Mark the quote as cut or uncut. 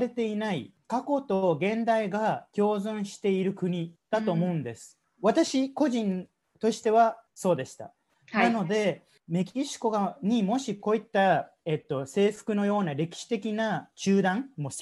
cut